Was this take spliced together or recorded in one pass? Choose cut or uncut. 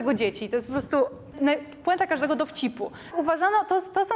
cut